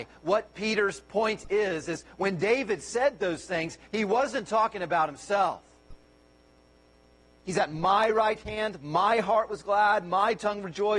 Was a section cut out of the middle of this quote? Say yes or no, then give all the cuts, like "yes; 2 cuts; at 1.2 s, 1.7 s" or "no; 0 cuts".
yes; 1 cut; at 7.4 s